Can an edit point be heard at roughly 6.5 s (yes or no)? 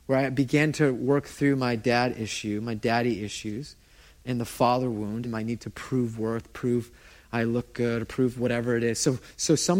no